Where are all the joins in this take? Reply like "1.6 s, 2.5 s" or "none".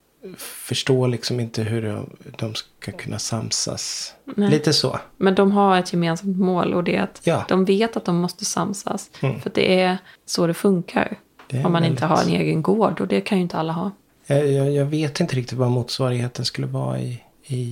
none